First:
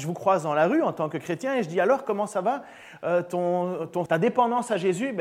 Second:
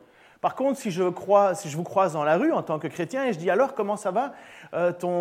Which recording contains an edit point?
first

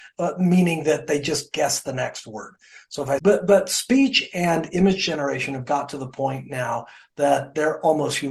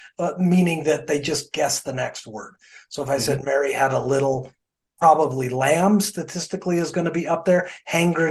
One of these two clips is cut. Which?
first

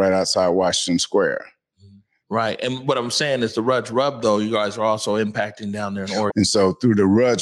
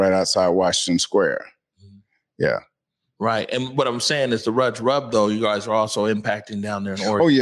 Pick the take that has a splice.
first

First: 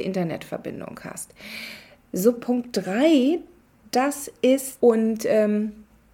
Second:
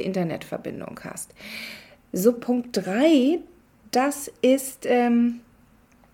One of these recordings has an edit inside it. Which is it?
first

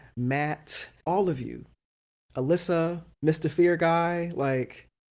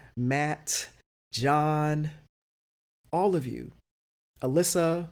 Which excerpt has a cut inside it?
first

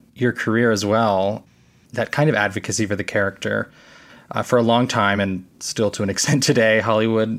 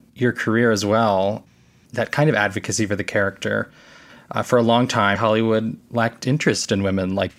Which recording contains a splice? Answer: second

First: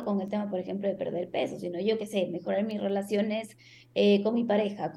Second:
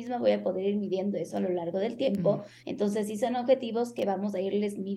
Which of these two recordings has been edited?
second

